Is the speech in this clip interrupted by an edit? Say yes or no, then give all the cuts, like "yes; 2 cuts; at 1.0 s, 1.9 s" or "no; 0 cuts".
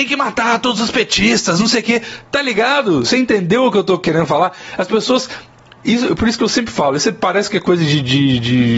no; 0 cuts